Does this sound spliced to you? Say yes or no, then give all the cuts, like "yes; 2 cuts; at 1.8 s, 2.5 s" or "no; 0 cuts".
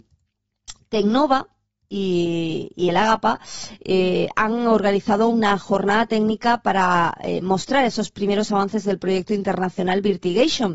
no; 0 cuts